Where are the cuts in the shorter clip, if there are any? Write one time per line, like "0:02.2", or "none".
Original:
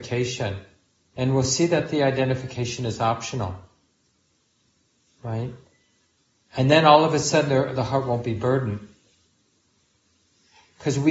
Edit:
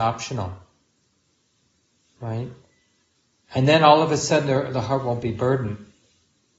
none